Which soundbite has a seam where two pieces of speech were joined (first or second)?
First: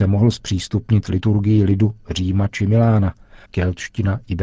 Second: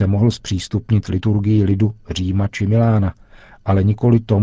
first